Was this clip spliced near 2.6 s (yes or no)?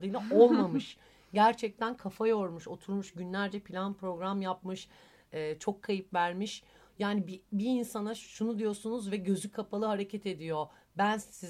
no